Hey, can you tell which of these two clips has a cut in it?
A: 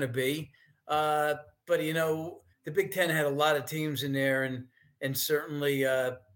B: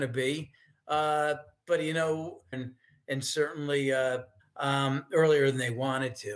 B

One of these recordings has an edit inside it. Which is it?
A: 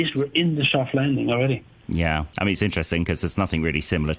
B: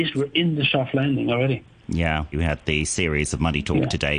B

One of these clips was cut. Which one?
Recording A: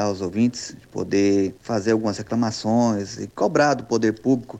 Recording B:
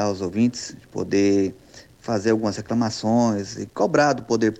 A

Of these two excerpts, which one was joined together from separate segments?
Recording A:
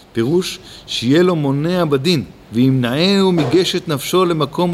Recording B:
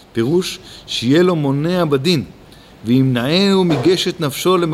A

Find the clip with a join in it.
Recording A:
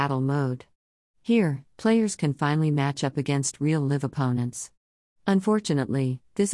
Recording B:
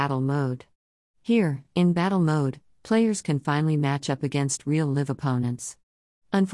A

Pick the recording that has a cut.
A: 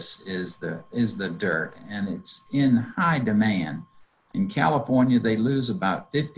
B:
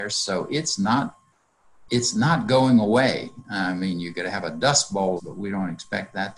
B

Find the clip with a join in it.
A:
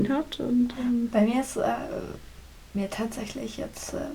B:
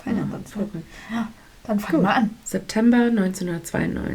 B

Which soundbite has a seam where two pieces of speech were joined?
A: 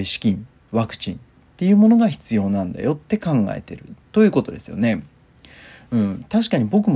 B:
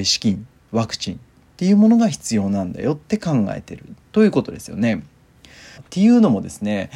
B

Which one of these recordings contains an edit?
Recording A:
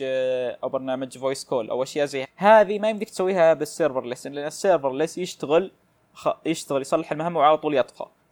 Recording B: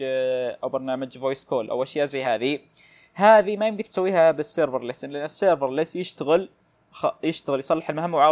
A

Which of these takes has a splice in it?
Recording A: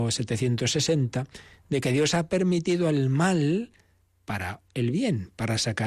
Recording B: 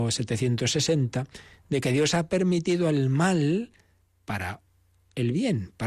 A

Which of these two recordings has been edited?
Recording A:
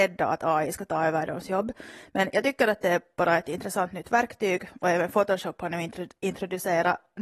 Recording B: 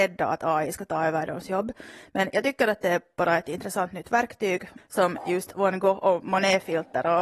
B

